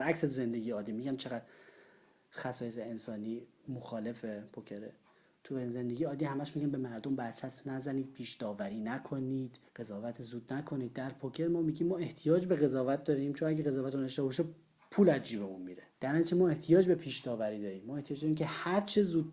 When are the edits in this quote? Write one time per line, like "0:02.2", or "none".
0:09.7
0:15.9